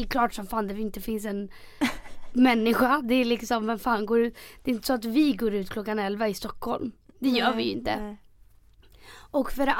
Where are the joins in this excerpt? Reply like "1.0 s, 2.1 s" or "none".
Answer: none